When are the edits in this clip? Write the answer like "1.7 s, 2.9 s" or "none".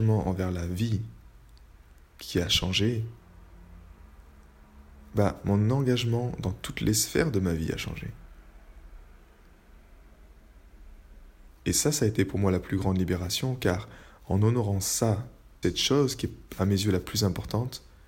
11.5 s, 15.6 s